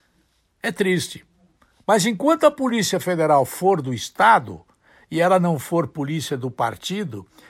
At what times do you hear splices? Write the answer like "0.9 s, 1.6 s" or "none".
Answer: none